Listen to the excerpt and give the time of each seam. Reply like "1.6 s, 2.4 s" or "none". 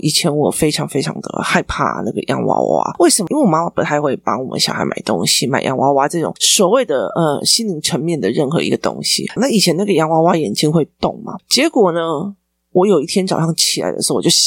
9.4 s